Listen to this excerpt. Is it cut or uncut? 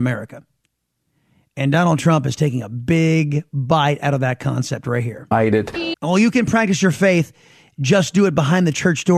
cut